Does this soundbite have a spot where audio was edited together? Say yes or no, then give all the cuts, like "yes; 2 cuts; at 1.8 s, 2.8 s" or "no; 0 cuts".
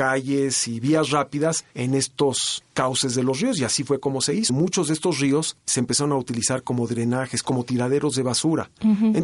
yes; 1 cut; at 4.5 s